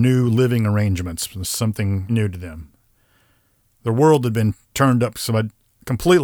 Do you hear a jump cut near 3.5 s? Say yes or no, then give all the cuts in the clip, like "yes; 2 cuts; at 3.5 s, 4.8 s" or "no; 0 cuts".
no; 1 cut; at 2.1 s